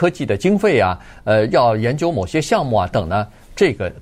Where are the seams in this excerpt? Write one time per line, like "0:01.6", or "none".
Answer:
0:02.9